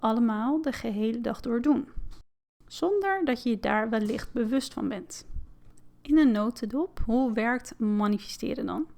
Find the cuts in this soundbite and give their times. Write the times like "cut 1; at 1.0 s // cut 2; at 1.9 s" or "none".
none